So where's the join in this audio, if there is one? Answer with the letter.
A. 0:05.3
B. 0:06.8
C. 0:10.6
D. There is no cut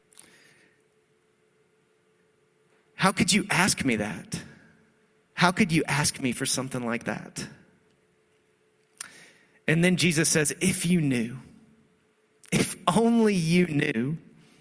A